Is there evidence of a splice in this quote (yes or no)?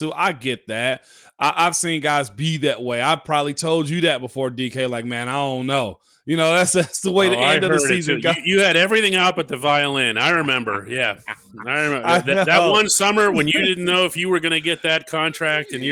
no